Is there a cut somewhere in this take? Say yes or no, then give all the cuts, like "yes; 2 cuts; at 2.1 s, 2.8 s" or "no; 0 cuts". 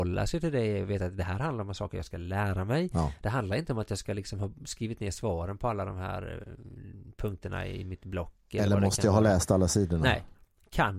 no; 0 cuts